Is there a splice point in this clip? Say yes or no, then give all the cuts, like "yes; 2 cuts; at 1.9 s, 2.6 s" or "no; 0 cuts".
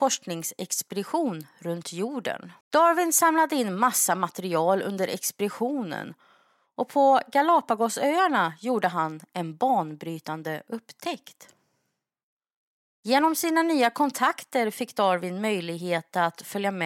yes; 2 cuts; at 2.6 s, 12.9 s